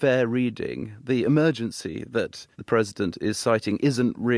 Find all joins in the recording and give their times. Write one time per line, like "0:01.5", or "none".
0:02.5